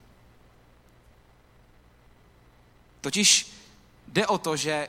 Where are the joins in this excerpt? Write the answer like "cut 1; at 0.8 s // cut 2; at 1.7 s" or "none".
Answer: none